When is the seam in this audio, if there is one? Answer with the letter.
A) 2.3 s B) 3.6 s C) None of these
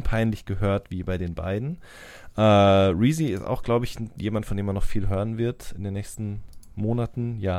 C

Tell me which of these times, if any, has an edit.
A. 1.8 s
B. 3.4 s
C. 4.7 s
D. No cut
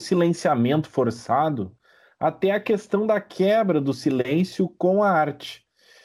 D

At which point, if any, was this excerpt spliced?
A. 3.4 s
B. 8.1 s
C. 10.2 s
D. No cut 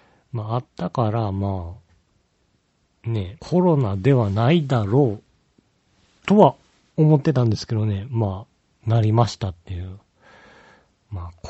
A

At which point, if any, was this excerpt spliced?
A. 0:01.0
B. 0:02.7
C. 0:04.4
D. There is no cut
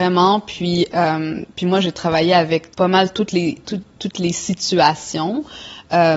B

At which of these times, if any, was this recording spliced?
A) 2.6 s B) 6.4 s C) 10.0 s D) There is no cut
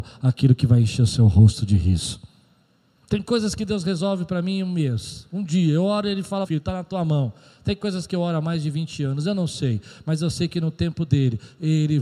B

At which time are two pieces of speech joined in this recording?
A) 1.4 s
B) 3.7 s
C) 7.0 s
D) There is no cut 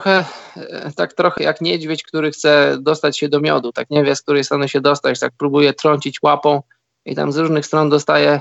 A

